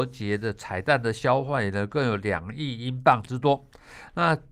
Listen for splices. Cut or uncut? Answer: uncut